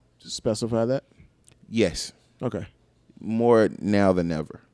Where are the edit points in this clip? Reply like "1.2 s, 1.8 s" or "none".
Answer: none